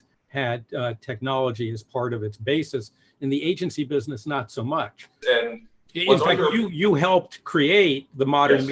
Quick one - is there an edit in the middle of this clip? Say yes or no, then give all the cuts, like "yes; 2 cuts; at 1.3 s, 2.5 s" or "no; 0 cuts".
yes; 1 cut; at 5.2 s